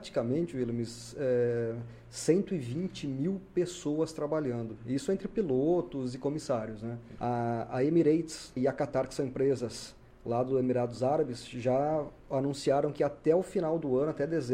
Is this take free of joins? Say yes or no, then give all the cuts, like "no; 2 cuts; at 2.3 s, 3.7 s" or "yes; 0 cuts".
no; 2 cuts; at 7.2 s, 8.6 s